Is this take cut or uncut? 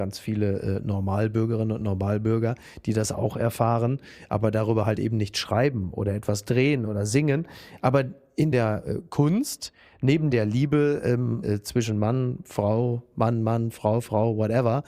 cut